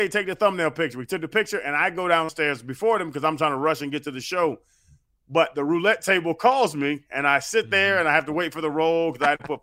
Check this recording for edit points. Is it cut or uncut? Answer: uncut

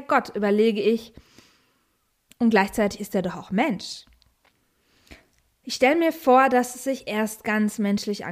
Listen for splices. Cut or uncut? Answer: uncut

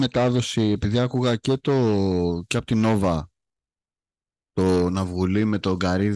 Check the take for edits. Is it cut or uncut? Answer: uncut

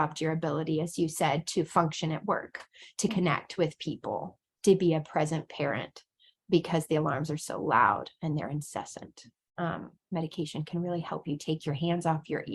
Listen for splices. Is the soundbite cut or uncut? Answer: uncut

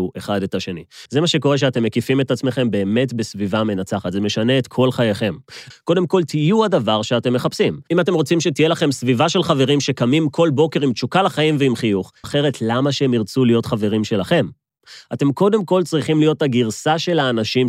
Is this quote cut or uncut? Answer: cut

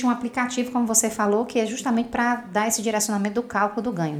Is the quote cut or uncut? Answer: uncut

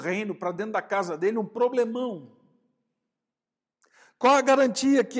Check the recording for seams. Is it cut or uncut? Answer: uncut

